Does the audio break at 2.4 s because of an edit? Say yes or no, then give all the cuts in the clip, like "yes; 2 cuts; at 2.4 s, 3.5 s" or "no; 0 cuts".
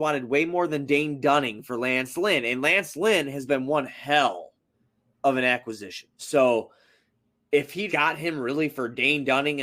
no; 2 cuts; at 6.1 s, 7.9 s